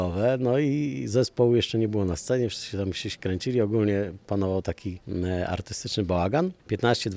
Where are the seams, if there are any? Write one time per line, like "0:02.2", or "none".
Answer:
none

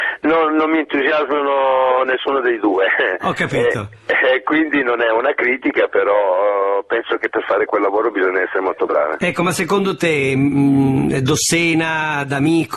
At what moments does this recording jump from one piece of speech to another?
none

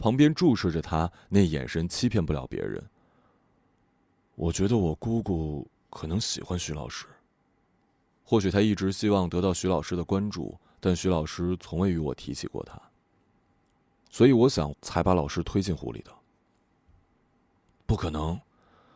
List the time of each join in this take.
0:08.2
0:14.7

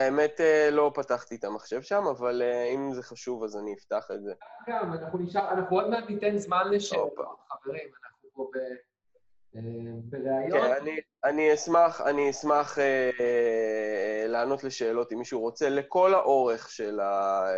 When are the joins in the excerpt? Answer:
none

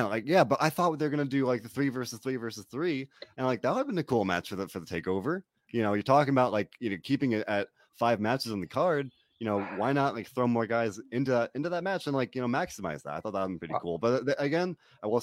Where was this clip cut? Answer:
none

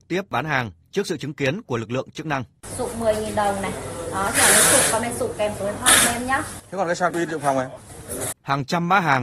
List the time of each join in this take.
0:08.3

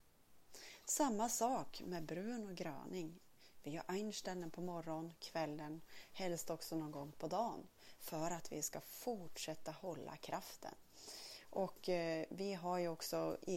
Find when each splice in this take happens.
none

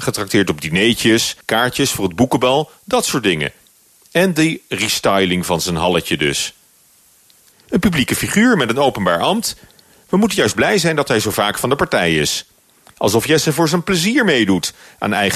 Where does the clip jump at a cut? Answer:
0:01.4
0:07.5

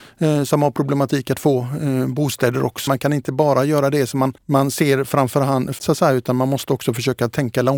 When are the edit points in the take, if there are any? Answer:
0:02.9
0:04.4
0:05.8

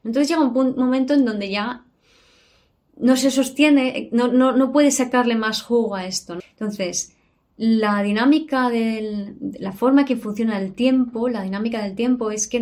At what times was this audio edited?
0:06.4

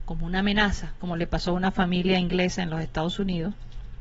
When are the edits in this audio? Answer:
none

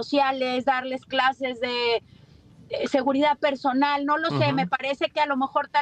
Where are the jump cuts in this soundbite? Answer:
none

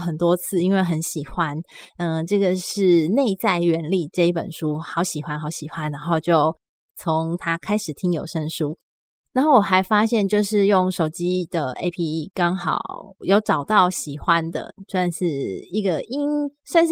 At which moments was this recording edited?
0:11.9
0:13.2

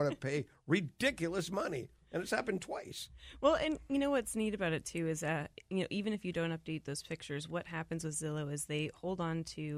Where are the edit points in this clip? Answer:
none

